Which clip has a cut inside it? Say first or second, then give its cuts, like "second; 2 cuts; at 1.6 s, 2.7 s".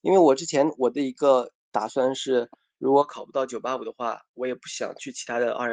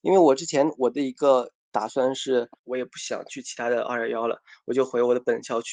second; 1 cut; at 2.6 s